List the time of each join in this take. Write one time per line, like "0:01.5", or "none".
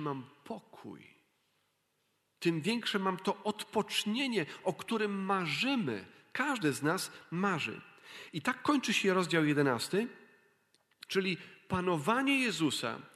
0:11.1